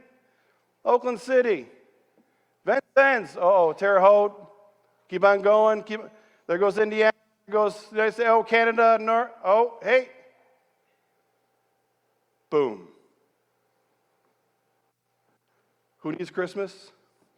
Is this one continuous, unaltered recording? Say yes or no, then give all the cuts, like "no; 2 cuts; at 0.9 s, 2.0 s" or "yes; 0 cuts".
yes; 0 cuts